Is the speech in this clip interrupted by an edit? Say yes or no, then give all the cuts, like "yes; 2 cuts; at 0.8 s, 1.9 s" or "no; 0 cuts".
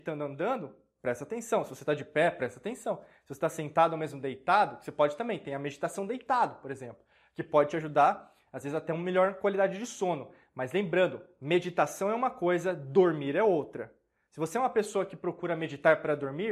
no; 0 cuts